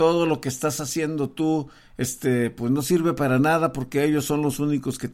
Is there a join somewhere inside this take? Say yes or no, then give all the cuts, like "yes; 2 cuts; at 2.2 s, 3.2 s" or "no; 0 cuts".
no; 0 cuts